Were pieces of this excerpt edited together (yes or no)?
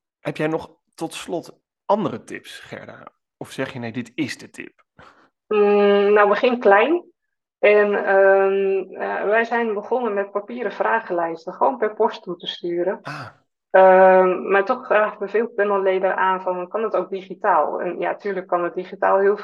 no